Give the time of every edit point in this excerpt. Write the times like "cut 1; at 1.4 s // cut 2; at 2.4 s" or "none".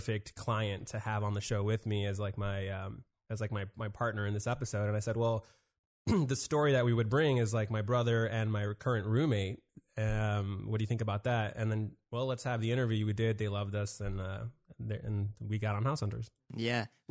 none